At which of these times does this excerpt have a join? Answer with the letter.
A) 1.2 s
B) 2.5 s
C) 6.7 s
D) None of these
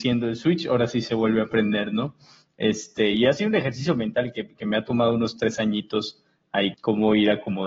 C